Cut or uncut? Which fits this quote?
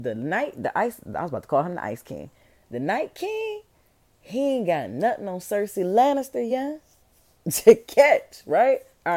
uncut